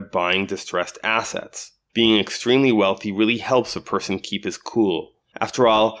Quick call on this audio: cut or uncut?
cut